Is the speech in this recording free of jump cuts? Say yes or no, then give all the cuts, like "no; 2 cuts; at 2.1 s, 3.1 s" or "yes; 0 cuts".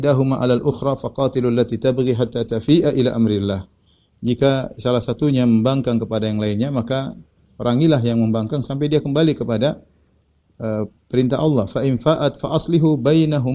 yes; 0 cuts